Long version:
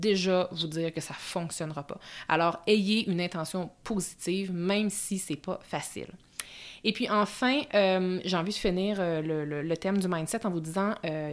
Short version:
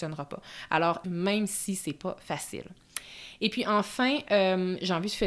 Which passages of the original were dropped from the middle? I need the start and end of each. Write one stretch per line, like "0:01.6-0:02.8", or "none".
0:02.6-0:04.5